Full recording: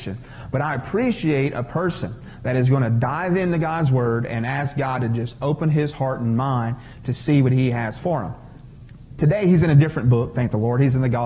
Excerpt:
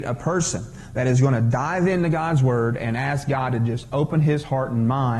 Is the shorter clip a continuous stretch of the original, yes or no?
yes